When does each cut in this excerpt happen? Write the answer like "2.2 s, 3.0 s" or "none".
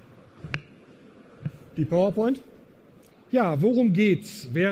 3.1 s